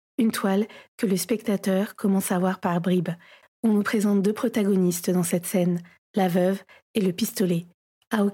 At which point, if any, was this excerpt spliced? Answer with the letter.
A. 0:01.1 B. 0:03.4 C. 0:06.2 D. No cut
B